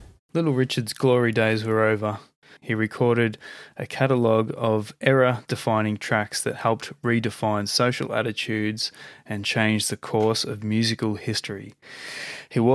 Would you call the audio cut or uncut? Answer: cut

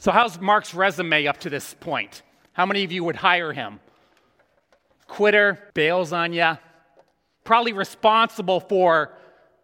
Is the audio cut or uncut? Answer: cut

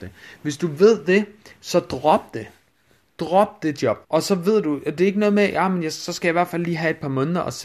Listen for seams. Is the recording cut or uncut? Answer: cut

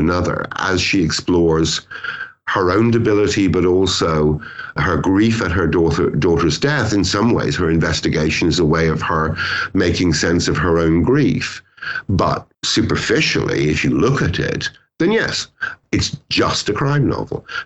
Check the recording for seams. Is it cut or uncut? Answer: uncut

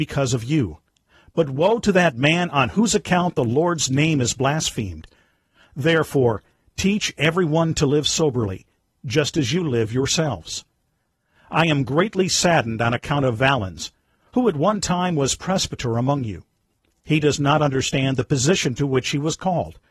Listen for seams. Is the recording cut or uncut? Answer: uncut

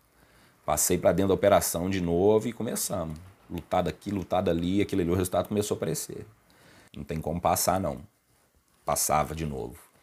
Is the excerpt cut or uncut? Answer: cut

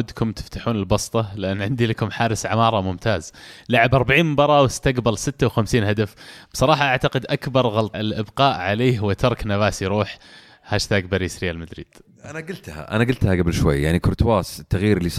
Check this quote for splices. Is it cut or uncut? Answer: cut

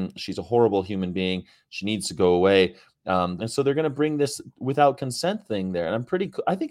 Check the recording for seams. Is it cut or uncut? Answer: cut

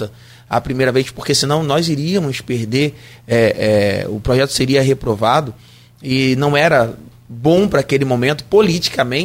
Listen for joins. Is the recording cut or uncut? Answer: uncut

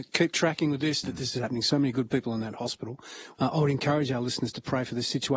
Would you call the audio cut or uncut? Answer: cut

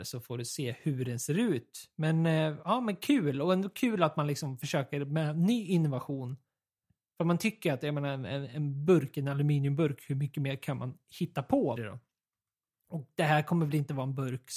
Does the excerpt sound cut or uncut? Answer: cut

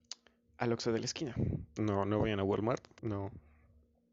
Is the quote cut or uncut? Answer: cut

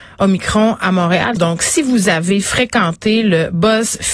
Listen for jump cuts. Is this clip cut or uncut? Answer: cut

